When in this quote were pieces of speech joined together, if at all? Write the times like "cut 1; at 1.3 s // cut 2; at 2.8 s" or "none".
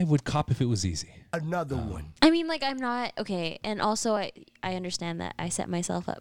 none